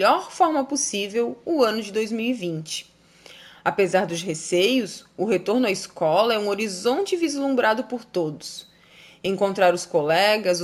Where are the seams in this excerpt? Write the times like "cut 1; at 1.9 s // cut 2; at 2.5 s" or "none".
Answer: none

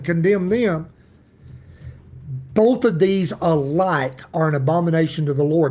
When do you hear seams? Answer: none

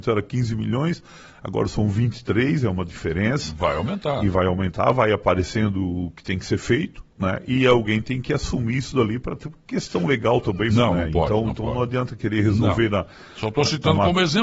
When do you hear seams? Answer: cut 1; at 10.7 s

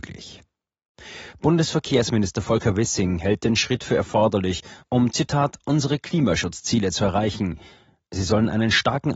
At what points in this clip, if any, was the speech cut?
none

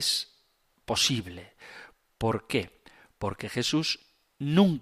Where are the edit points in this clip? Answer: none

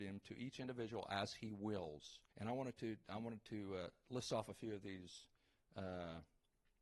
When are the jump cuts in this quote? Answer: cut 1; at 2.3 s

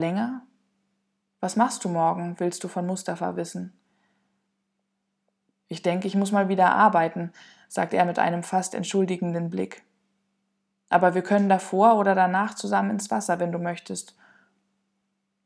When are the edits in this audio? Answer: cut 1; at 1.2 s

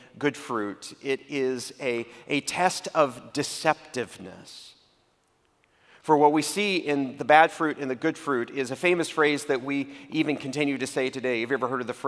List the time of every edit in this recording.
none

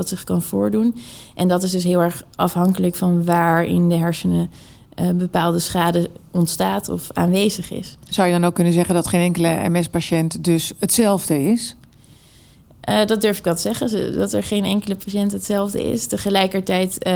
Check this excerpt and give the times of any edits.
none

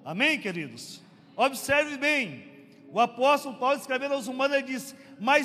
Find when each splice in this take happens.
none

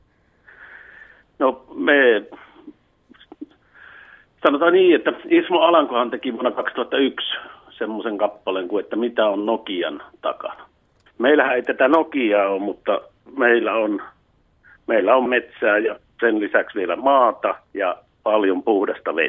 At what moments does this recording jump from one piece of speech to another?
cut 1; at 11.1 s // cut 2; at 15.3 s // cut 3; at 17.6 s

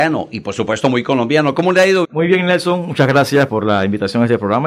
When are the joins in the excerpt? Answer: cut 1; at 2.0 s // cut 2; at 3.5 s

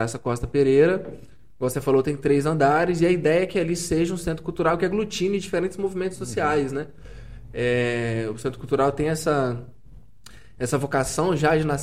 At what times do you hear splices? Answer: none

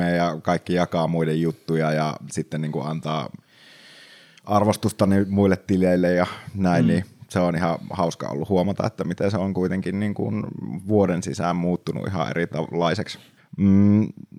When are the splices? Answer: cut 1; at 13.4 s

